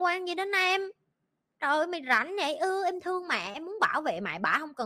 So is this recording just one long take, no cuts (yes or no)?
yes